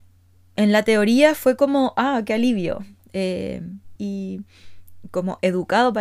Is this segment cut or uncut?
cut